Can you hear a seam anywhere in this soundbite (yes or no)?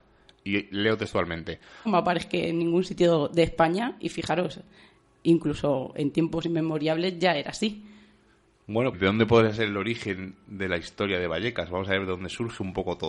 yes